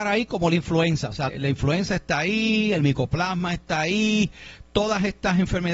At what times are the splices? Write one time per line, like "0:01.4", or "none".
0:01.3

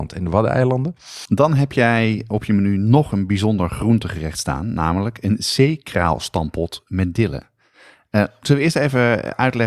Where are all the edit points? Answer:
0:01.3

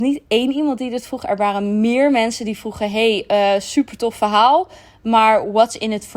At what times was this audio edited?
none

